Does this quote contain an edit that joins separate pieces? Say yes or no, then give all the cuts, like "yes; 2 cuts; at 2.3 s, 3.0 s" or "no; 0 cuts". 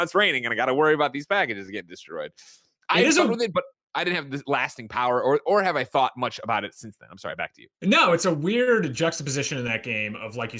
no; 0 cuts